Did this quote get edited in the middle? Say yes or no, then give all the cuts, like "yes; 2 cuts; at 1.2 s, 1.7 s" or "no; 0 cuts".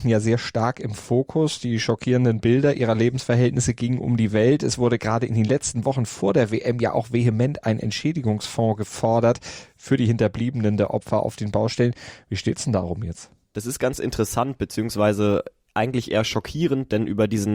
no; 0 cuts